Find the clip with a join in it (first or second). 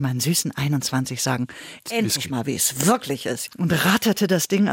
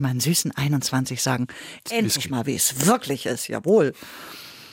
first